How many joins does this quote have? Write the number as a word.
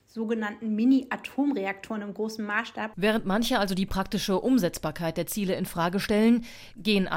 one